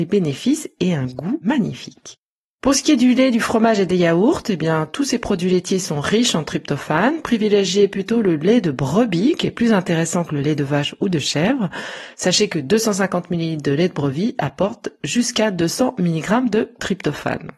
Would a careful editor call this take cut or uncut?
uncut